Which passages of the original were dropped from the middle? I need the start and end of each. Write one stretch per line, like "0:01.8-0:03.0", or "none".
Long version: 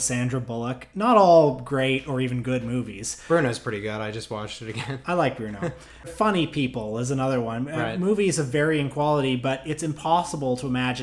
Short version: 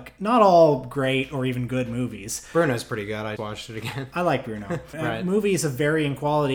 0:04.1-0:04.3
0:05.9-0:07.7

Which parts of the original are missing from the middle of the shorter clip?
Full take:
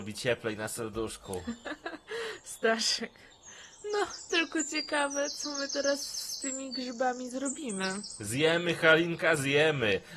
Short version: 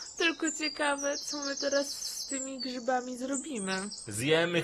none

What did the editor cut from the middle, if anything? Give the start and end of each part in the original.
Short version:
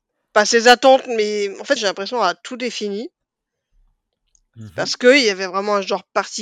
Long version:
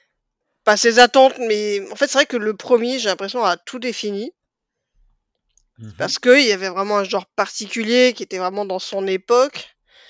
0:02.1-0:03.0

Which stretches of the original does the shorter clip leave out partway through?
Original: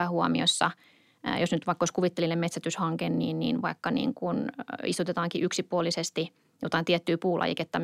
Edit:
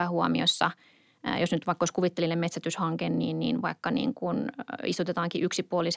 none

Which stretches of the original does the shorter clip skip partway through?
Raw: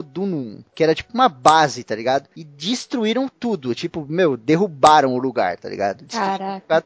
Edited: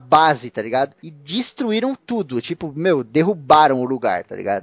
none

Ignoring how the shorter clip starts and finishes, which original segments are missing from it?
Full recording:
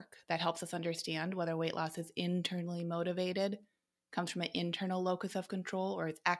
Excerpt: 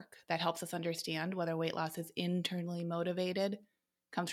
none

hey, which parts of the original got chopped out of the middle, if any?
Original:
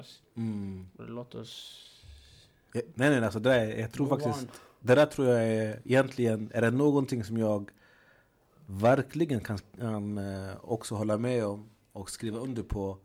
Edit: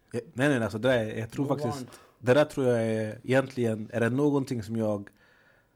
none

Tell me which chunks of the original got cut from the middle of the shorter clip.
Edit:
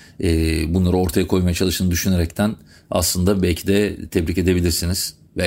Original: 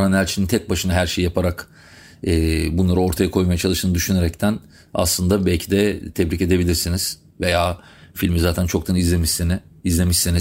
none

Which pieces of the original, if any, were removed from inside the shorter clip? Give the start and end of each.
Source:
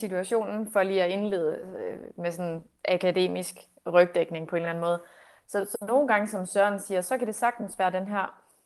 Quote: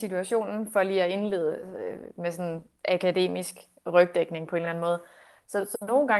none

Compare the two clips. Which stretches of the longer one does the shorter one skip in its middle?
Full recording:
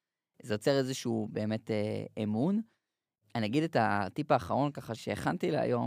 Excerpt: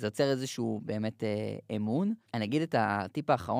0:02.7-0:03.3

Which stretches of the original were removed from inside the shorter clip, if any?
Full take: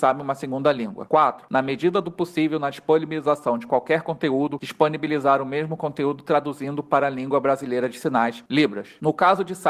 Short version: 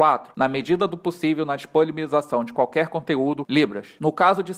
0:04.6-0:08.5

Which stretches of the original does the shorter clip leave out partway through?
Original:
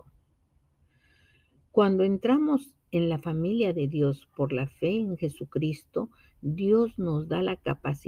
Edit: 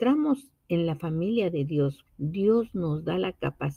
0:04.3-0:06.3

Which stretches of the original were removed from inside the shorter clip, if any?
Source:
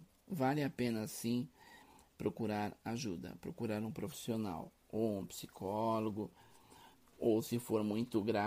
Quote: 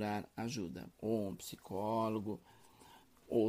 0:03.4-0:04.8

